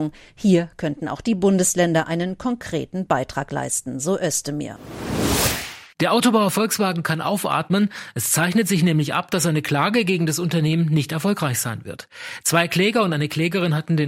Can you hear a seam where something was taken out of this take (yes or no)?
no